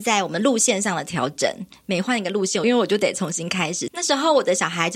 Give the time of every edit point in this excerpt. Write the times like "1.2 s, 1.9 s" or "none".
2.6 s, 3.9 s